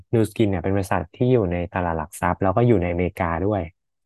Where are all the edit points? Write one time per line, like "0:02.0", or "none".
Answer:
none